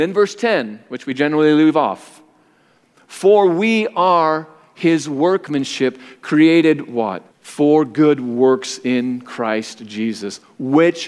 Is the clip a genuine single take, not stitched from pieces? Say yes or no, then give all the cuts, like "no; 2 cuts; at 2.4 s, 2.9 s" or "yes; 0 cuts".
no; 1 cut; at 7.3 s